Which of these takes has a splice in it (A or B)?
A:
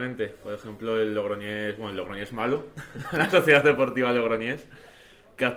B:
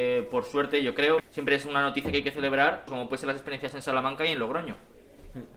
B